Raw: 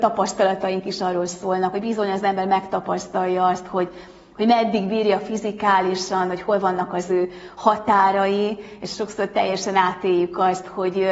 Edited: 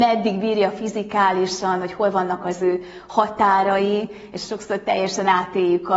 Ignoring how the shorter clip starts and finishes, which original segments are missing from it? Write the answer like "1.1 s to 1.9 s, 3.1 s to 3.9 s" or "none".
none